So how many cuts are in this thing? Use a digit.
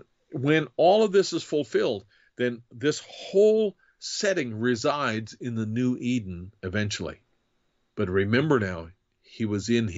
1